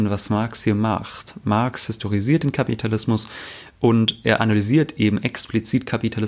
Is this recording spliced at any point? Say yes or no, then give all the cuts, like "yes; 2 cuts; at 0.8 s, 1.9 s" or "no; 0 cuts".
no; 0 cuts